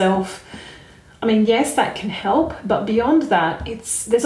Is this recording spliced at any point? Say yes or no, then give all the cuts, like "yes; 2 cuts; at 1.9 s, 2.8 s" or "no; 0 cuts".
no; 0 cuts